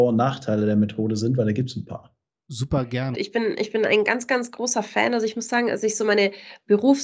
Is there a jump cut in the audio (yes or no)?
yes